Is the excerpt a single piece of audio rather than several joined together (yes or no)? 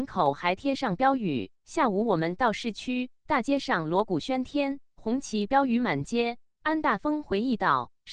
no